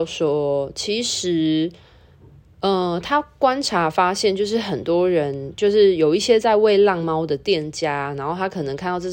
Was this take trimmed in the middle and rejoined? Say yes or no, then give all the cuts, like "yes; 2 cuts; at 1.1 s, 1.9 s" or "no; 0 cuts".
no; 0 cuts